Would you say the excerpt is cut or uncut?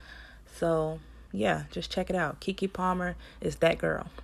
cut